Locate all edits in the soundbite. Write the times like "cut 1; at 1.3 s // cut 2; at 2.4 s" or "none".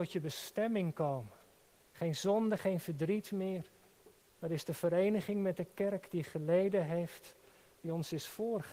cut 1; at 2.6 s // cut 2; at 4.4 s